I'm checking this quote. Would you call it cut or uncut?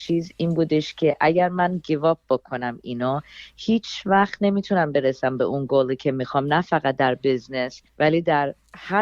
cut